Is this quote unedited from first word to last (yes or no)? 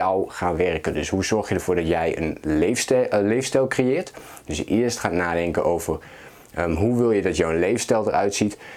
yes